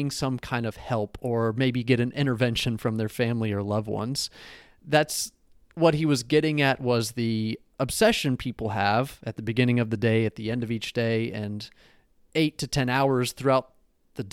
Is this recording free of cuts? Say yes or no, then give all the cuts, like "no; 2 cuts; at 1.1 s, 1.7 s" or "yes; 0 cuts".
yes; 0 cuts